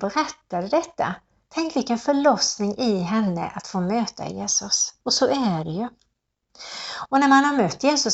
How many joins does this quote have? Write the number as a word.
one